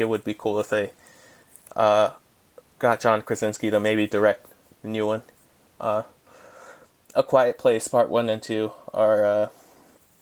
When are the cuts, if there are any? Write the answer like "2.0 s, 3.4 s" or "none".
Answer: none